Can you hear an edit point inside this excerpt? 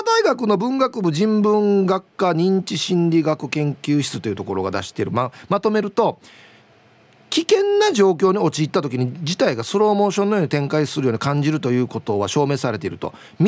no; 0 cuts

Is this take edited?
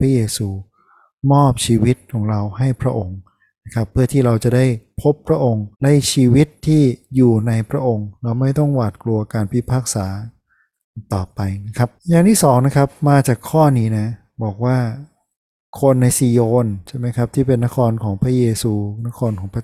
yes; 2 cuts; at 5.7 s, 12.0 s

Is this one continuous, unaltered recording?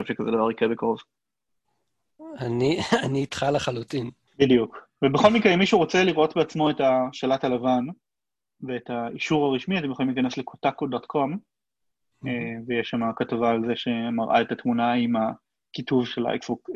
no; 1 cut; at 4.3 s

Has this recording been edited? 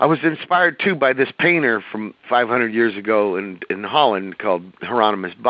no; 0 cuts

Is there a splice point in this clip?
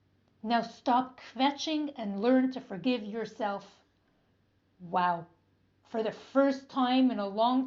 no; 0 cuts

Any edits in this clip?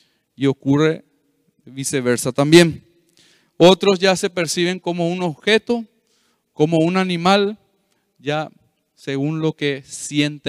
no; 0 cuts

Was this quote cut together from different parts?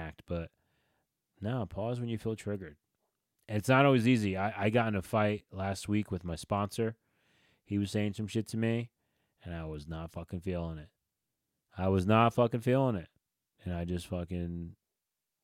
no; 0 cuts

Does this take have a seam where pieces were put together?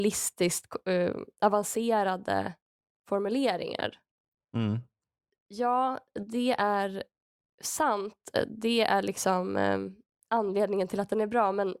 no; 0 cuts

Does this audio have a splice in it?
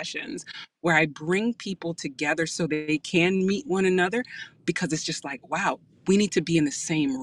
no; 0 cuts

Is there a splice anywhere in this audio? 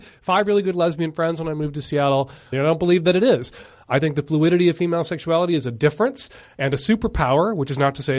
yes; 1 cut; at 2.5 s

